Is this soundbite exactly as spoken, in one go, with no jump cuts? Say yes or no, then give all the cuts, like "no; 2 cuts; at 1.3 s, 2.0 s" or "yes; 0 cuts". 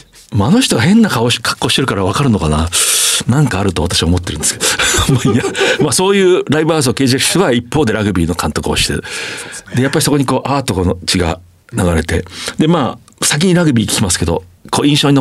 yes; 0 cuts